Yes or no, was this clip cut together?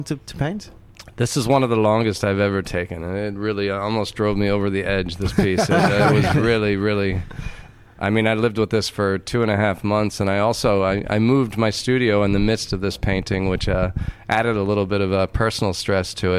no